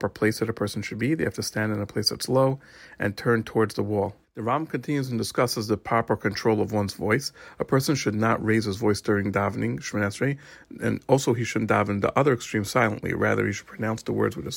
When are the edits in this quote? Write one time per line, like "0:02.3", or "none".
0:04.2